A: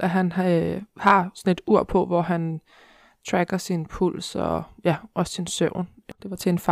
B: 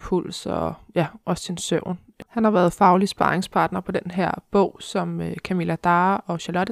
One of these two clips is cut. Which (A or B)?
B